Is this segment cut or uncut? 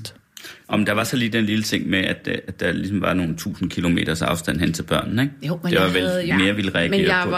cut